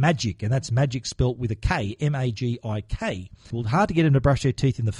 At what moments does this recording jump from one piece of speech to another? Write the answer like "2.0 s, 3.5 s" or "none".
3.5 s